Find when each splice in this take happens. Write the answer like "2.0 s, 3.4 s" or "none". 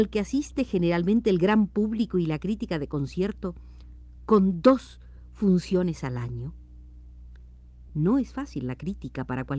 7.9 s